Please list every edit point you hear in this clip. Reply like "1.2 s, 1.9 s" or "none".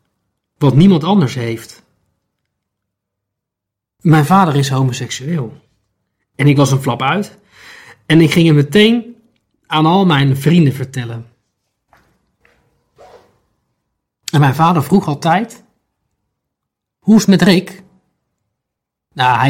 none